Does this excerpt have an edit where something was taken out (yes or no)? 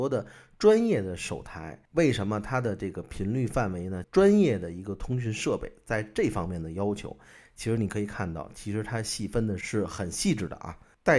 yes